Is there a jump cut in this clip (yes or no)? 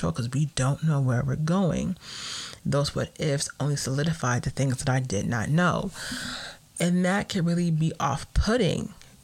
yes